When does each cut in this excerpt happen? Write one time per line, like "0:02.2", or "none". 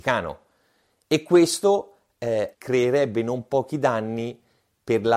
0:02.5